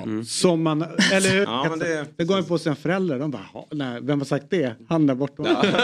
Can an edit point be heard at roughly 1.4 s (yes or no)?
yes